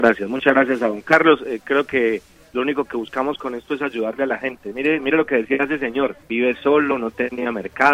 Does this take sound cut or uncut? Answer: cut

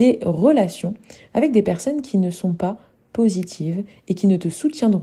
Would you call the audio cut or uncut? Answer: uncut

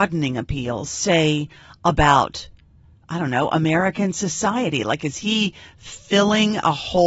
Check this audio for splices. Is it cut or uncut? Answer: uncut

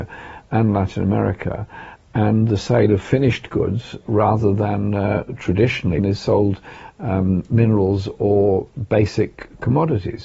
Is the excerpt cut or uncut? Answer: cut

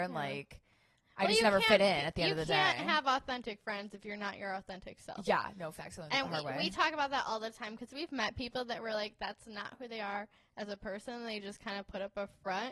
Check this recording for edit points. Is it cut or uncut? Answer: uncut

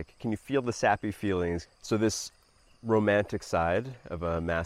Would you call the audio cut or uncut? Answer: cut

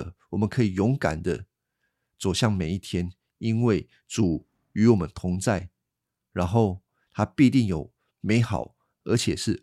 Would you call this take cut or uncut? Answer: uncut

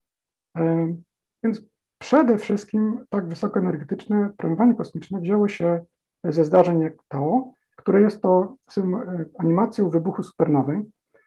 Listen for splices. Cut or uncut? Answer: cut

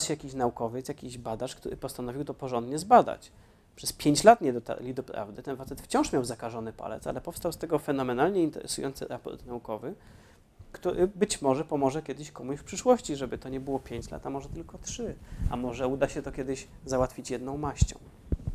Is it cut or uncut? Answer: uncut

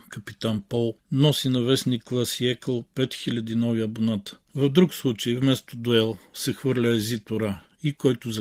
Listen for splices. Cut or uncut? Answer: cut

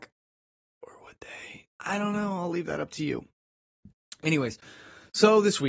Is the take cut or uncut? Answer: cut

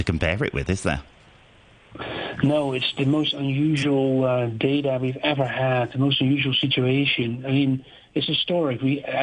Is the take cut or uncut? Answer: uncut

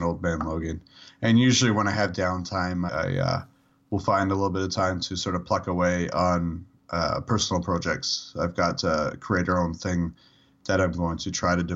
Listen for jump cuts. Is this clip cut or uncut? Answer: cut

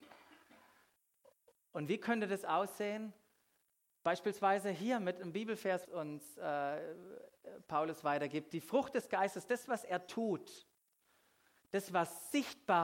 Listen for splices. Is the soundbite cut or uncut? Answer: cut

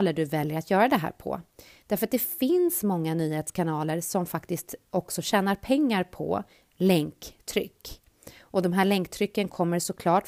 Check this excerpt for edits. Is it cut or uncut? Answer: uncut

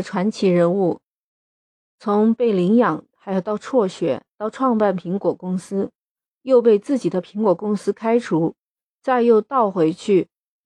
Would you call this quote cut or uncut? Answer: uncut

